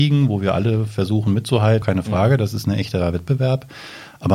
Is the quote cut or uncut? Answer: cut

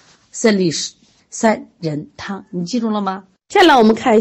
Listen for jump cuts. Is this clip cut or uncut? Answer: cut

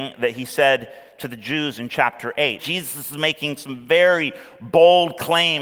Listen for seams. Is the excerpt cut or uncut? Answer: cut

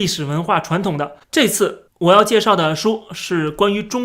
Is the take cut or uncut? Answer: cut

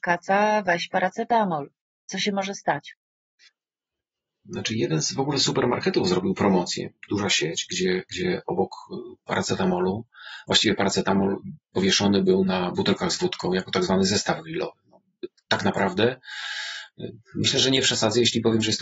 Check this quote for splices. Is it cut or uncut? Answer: uncut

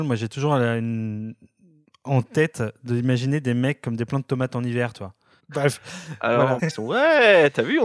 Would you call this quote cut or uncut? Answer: cut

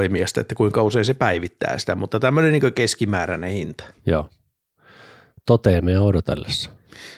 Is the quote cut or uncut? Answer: uncut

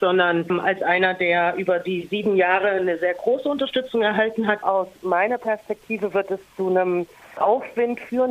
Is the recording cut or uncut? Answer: cut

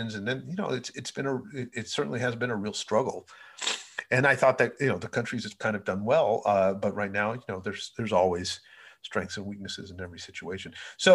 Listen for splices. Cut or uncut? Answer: uncut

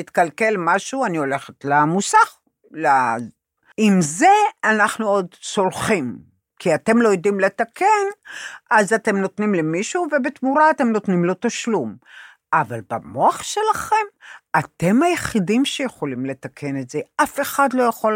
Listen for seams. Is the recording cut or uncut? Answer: cut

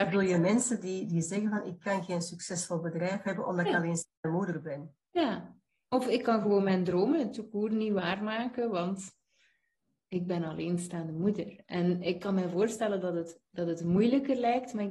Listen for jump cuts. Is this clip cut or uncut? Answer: uncut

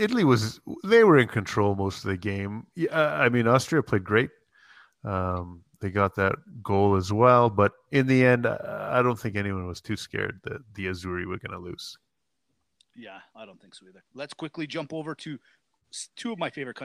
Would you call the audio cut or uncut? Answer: cut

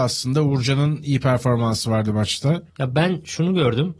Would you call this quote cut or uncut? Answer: cut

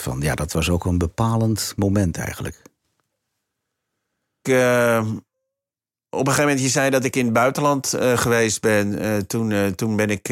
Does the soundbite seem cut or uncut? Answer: cut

